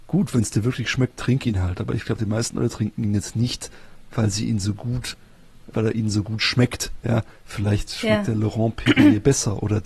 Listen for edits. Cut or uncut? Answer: cut